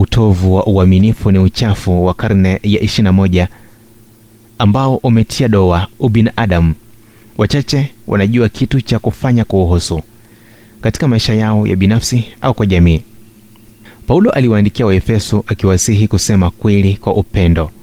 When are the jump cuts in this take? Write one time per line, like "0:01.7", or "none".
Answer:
none